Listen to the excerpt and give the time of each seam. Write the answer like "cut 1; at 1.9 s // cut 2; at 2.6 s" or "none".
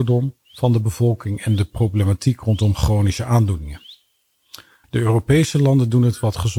cut 1; at 4.8 s